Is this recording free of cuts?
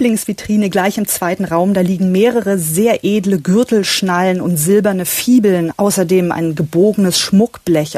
no; 1 cut; at 5.7 s

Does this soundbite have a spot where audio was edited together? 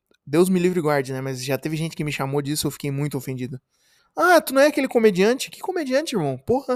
yes; 1 cut; at 4.0 s

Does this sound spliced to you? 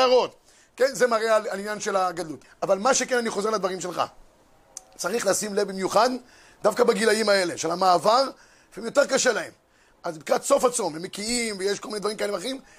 yes; 1 cut; at 2.4 s

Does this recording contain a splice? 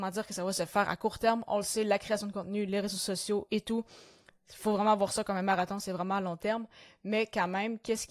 no; 0 cuts

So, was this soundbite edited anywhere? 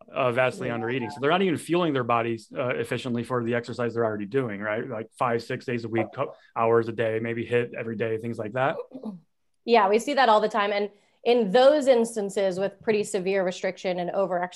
no; 0 cuts

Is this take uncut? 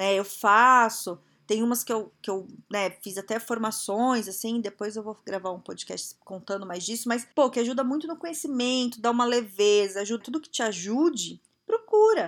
no; 2 cuts; at 7.3 s, 10.2 s

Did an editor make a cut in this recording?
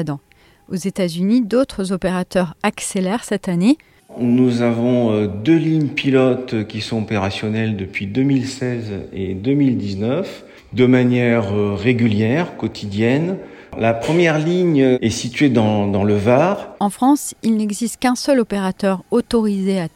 yes; 2 cuts; at 4.0 s, 16.8 s

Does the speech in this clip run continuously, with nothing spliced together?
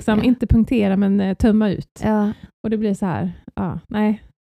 no; 1 cut; at 2.5 s

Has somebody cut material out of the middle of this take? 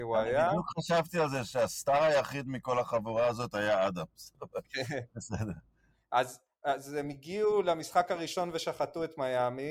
no; 0 cuts

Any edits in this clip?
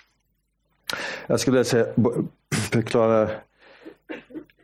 no; 0 cuts

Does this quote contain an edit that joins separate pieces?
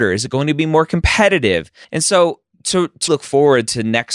yes; 2 cuts; at 1.8 s, 3.1 s

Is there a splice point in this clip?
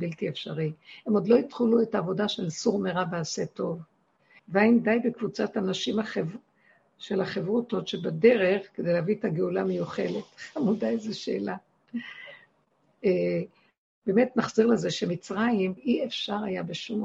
yes; 2 cuts; at 4.4 s, 15.8 s

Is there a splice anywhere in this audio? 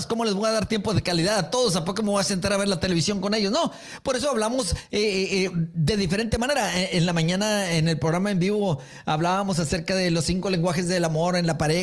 no; 0 cuts

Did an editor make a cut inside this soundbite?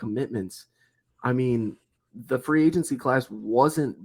no; 0 cuts

